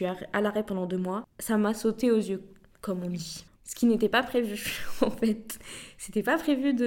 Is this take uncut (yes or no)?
no